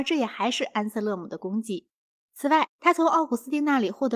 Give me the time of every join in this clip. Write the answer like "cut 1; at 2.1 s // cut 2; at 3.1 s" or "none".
cut 1; at 2.6 s